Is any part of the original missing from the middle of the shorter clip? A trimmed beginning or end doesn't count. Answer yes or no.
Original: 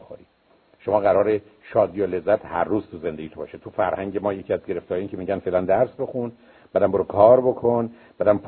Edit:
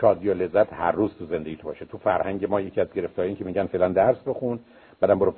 no